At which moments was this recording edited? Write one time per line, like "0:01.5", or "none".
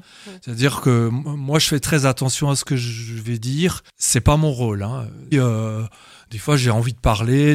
0:01.8
0:05.3